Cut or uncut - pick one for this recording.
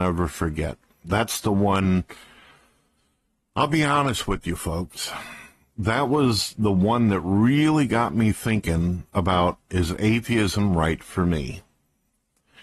uncut